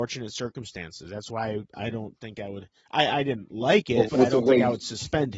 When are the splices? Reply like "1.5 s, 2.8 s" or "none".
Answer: 4.1 s